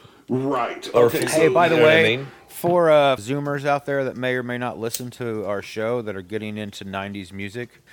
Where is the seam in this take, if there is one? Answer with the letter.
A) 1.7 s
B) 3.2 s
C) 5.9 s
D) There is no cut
B